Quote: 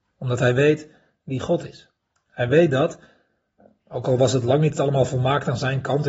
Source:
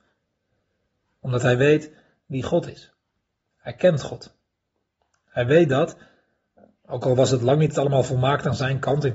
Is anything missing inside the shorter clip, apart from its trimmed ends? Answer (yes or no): yes